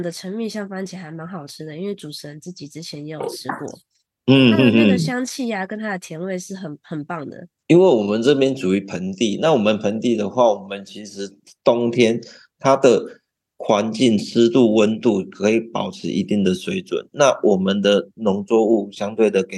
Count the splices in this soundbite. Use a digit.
0